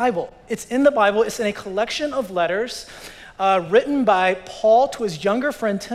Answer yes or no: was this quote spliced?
no